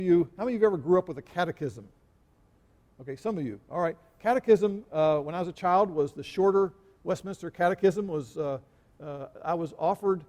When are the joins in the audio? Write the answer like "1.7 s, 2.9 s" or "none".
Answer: none